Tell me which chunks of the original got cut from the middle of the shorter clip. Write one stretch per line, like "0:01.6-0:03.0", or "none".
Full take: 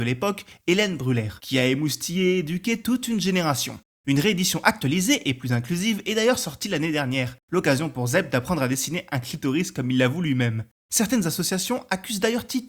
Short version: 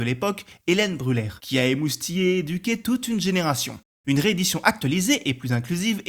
none